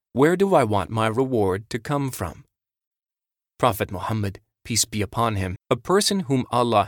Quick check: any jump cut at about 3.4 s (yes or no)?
no